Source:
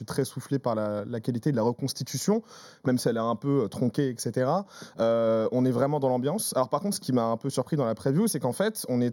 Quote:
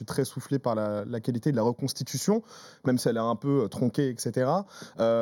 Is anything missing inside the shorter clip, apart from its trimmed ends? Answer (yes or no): no